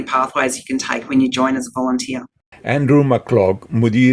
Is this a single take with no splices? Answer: yes; 0 cuts

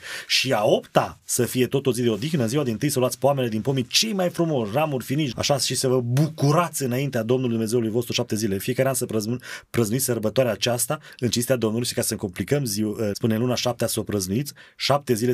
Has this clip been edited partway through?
yes; 2 cuts; at 5.3 s, 13.1 s

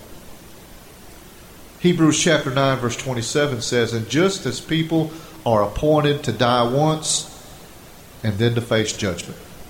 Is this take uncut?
yes; 0 cuts

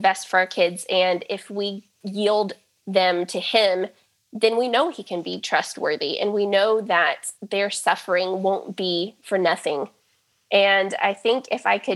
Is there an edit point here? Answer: no; 0 cuts

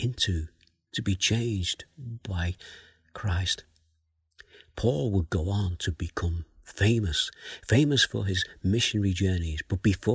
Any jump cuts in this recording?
no; 0 cuts

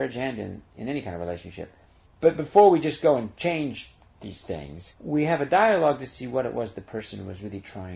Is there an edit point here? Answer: no; 0 cuts

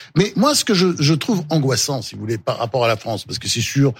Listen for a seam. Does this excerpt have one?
no; 0 cuts

